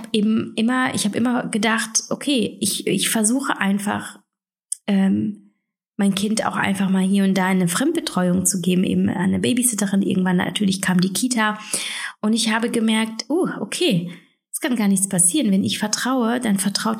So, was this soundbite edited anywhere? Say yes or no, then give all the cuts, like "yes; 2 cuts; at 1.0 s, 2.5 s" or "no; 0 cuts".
no; 0 cuts